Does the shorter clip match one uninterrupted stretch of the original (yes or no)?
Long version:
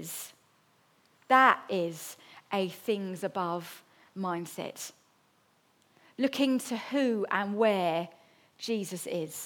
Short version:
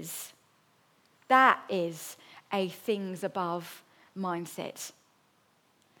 yes